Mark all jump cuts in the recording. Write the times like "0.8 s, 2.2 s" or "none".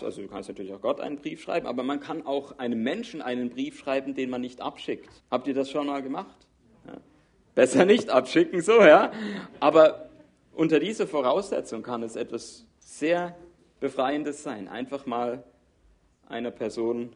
5.2 s

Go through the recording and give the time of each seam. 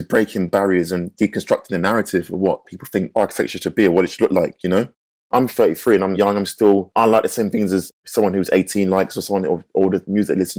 6.9 s

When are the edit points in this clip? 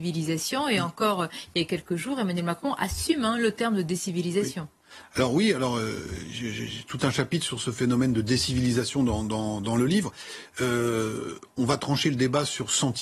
none

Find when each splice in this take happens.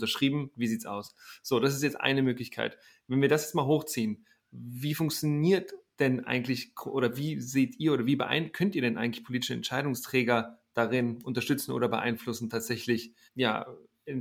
13.3 s

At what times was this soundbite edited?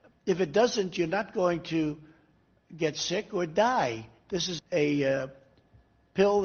4.6 s

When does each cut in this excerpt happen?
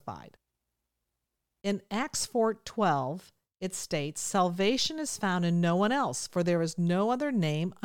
1.6 s

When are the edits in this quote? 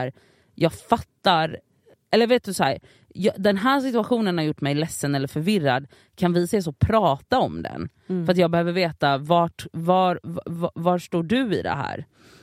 none

